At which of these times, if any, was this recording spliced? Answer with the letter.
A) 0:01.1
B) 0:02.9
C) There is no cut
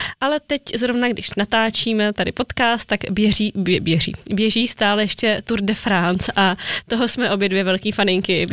C